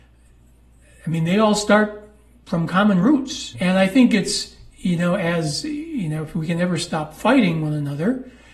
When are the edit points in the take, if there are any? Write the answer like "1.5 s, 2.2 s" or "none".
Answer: 3.5 s